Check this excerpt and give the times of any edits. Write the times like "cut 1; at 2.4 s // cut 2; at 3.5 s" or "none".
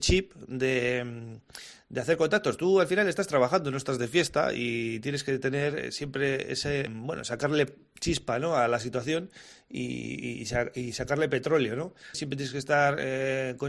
cut 1; at 6.9 s // cut 2; at 12.1 s